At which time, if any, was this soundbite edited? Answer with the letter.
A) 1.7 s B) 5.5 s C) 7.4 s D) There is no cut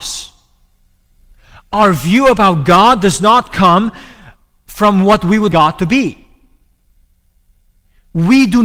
B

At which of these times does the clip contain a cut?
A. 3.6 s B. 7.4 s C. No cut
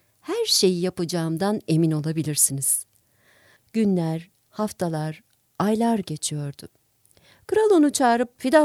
A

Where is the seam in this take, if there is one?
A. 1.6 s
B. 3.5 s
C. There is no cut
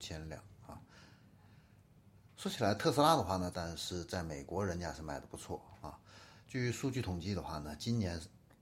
B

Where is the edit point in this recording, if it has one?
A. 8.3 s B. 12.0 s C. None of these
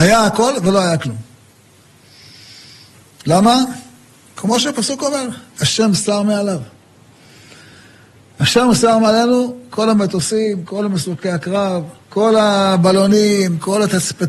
B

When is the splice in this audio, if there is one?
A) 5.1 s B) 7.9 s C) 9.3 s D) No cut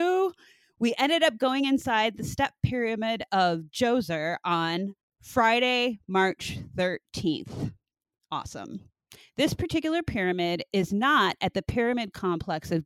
A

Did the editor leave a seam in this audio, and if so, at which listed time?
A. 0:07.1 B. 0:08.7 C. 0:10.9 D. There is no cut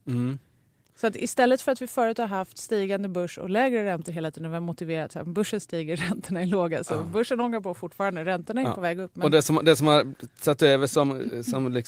D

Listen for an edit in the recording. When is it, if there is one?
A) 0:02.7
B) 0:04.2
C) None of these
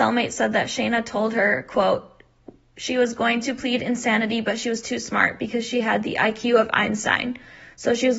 C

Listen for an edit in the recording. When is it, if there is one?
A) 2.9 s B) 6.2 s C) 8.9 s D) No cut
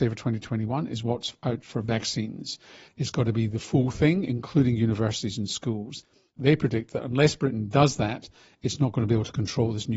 A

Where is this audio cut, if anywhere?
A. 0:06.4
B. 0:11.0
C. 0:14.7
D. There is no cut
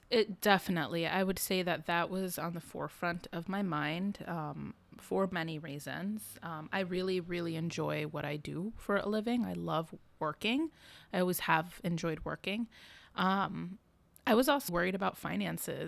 C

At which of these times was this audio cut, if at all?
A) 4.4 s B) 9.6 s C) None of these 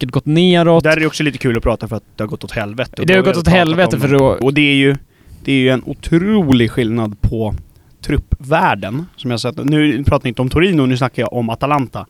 A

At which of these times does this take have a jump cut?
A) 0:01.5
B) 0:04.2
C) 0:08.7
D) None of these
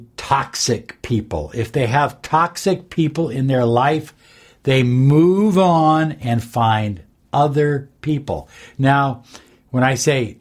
D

